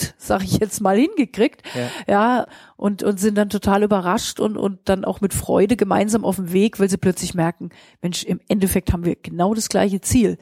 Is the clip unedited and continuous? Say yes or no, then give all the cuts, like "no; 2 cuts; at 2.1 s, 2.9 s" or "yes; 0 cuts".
yes; 0 cuts